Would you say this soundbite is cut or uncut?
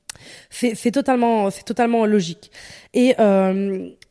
uncut